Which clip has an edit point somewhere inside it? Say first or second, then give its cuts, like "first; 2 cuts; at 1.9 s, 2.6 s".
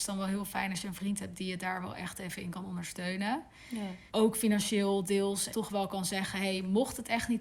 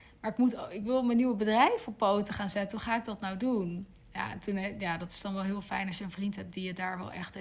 first; 2 cuts; at 4.1 s, 5.5 s